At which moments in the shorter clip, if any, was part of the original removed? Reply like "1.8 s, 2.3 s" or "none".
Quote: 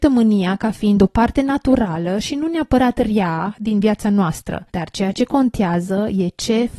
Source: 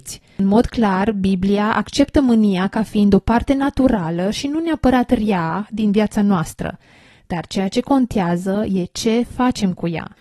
4.7 s